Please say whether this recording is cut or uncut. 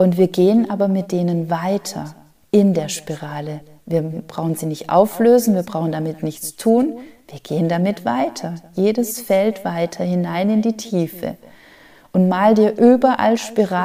uncut